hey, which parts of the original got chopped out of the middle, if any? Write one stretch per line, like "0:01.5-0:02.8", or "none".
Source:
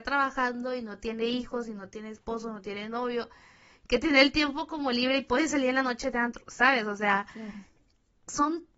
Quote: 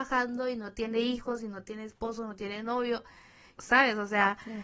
0:03.8-0:06.4